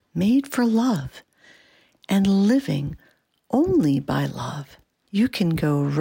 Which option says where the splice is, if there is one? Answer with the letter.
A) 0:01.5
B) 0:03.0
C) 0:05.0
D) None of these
C